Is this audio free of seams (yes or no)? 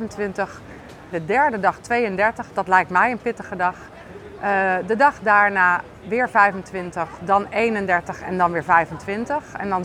no